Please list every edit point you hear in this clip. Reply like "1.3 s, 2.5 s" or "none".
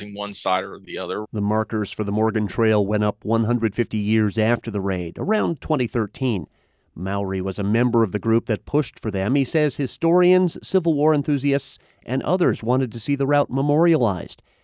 1.2 s